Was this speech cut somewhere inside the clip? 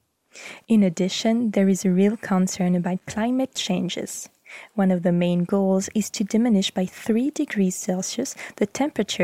no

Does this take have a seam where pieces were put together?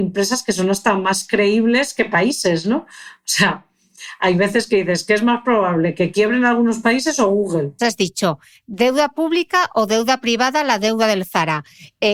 yes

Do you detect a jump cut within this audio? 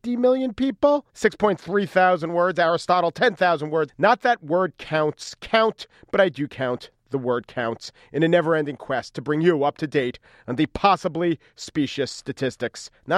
yes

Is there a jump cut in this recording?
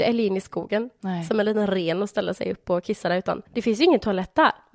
yes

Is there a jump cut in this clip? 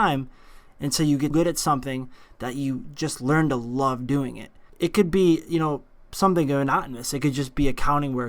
yes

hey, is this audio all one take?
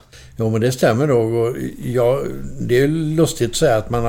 yes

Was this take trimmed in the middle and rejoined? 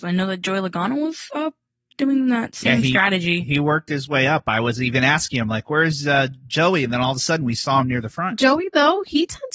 no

